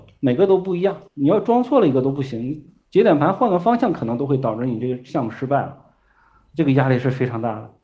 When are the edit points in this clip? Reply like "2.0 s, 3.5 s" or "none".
1.1 s